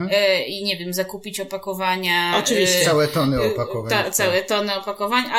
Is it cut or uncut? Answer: uncut